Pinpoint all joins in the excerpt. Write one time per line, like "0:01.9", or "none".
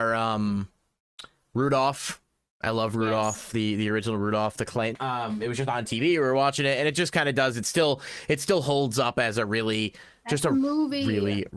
0:04.9